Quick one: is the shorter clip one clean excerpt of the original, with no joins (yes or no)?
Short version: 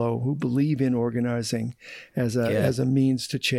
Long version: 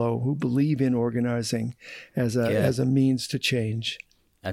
yes